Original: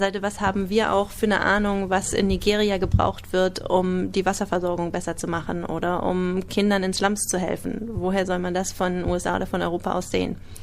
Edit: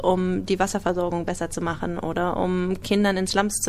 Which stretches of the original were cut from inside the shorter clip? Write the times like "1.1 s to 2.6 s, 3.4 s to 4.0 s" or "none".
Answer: none